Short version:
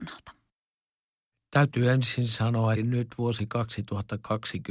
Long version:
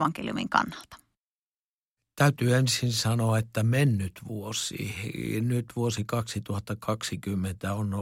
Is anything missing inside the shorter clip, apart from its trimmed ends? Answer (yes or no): yes